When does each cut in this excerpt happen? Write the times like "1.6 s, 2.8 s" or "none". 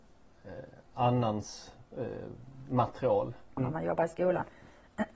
3.6 s